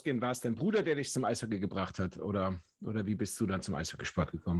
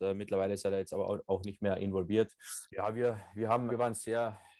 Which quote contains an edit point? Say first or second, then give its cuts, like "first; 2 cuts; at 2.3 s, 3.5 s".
second; 2 cuts; at 2.7 s, 3.7 s